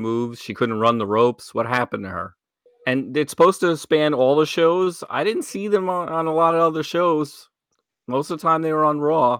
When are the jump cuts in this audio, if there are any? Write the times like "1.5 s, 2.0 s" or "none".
2.7 s